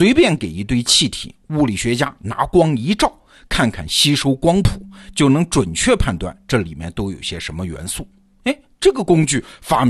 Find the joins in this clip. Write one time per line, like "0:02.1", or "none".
none